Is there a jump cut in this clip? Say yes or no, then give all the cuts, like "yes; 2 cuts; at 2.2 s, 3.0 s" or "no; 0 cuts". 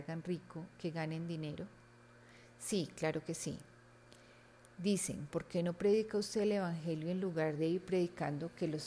yes; 1 cut; at 5.3 s